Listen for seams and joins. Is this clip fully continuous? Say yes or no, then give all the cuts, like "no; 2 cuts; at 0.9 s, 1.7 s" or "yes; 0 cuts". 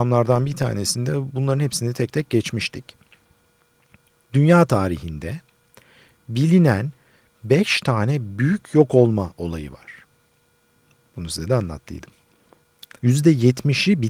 no; 1 cut; at 13.0 s